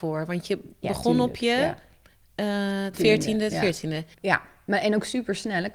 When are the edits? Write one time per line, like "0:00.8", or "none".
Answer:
0:02.9
0:04.1